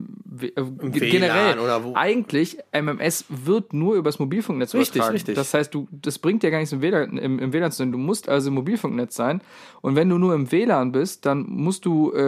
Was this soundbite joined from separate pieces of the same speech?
no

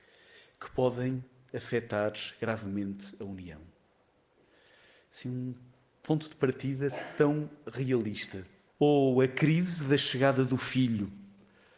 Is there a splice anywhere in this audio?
yes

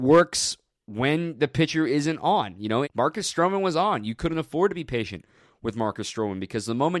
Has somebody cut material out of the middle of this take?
yes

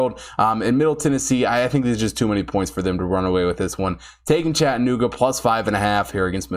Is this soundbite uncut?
yes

